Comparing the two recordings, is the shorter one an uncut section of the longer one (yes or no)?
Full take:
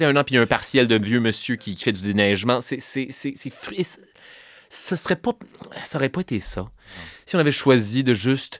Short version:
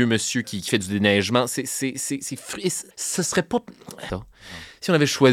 no